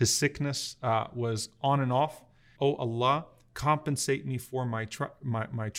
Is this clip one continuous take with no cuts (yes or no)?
no